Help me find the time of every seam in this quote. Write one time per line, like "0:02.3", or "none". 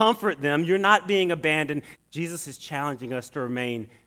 0:02.0